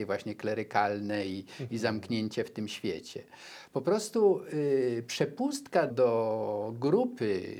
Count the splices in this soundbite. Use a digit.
1